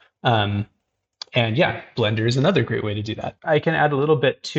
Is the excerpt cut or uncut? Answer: cut